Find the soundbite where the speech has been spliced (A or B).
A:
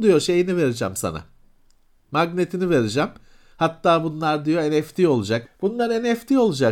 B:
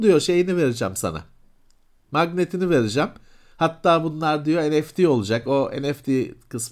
A